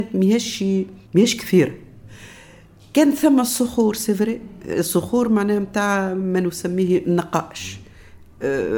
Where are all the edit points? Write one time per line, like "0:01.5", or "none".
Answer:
0:01.0